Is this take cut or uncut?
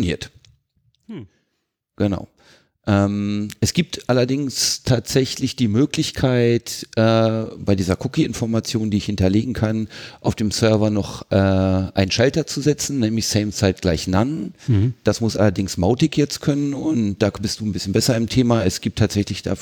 uncut